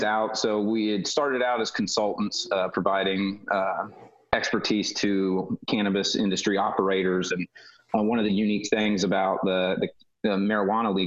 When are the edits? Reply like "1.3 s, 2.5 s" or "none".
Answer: 7.3 s